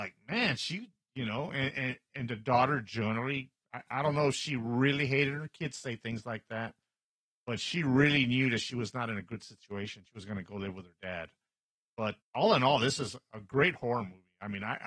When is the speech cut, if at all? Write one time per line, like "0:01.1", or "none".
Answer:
0:12.2